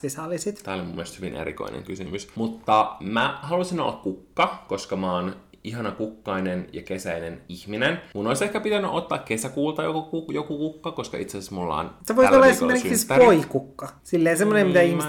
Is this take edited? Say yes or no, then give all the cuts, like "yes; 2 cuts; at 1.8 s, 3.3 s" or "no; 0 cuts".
no; 0 cuts